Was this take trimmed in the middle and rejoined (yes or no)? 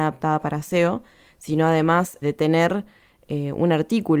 yes